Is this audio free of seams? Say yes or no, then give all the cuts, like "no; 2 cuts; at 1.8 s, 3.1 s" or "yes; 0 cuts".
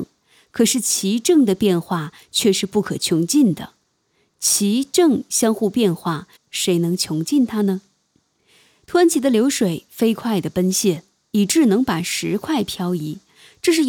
no; 1 cut; at 6.4 s